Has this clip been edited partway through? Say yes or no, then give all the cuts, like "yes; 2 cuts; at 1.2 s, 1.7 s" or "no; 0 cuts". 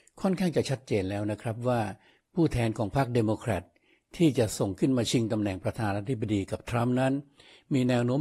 no; 0 cuts